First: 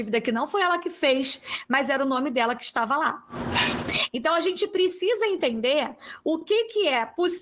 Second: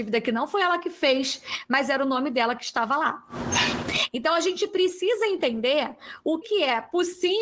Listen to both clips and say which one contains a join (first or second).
second